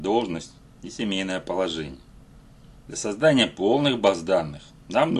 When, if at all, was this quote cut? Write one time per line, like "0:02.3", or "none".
0:02.9